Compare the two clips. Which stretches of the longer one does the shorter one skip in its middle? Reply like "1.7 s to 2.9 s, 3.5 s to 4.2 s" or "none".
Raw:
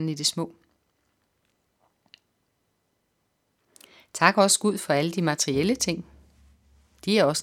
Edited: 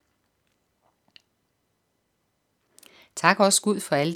none